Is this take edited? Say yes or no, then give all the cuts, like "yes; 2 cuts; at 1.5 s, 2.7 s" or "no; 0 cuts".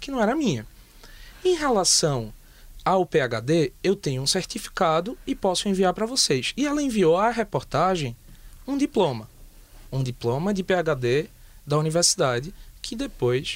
no; 0 cuts